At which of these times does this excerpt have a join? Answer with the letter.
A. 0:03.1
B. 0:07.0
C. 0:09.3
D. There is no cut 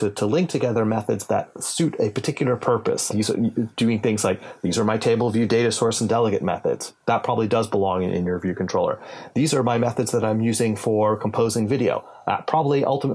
A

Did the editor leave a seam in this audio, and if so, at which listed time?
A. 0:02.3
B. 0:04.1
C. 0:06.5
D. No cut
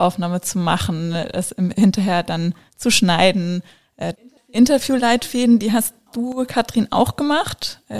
B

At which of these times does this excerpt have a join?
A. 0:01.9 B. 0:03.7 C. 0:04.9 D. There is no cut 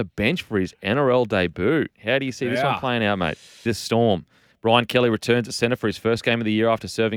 B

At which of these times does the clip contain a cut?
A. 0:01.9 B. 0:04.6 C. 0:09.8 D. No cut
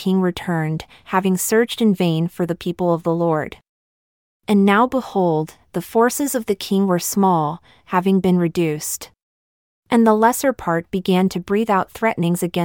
C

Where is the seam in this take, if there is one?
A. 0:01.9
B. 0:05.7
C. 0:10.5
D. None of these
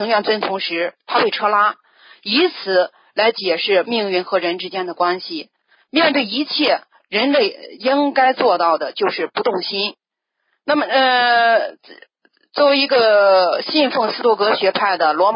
B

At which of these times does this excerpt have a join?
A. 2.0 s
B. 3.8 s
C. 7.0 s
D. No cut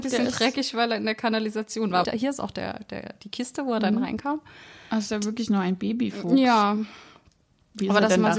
A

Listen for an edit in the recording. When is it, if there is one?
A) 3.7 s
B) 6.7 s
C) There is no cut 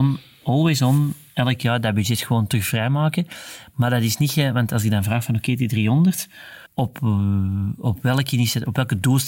B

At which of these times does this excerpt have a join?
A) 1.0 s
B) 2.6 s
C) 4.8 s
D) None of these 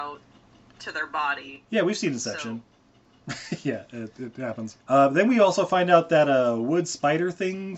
C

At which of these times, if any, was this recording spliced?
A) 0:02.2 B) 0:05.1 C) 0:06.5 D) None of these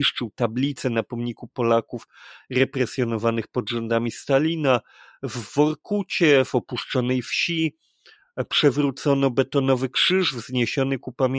D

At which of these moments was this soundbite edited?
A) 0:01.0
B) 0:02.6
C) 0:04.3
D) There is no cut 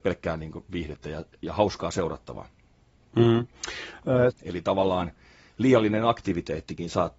C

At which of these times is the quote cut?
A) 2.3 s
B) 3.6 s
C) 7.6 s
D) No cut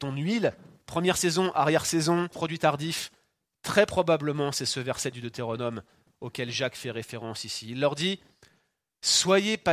A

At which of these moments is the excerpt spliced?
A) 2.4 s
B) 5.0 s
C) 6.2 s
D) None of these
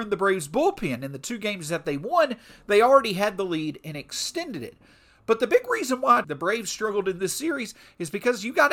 C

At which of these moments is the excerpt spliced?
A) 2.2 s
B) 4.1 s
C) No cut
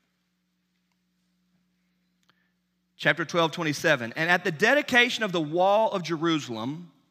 C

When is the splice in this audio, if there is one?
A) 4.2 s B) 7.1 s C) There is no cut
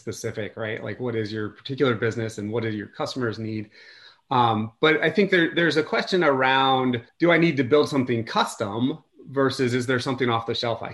B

